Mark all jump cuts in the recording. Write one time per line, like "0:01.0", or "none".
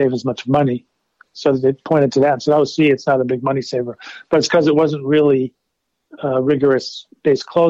none